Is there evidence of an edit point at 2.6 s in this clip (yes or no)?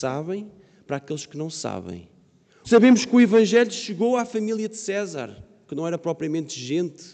yes